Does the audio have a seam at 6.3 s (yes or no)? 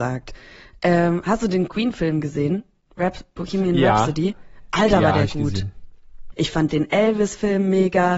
yes